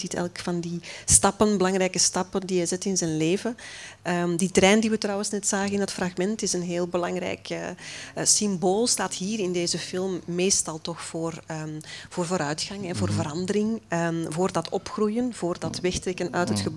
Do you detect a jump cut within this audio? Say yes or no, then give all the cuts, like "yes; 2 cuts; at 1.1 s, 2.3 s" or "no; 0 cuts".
no; 0 cuts